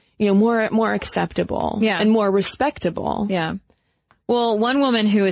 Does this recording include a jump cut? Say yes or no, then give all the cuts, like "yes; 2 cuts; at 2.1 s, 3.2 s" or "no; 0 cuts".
no; 0 cuts